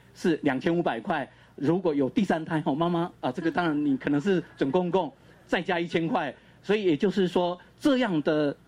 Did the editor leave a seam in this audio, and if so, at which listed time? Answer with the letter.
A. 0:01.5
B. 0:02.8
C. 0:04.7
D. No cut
D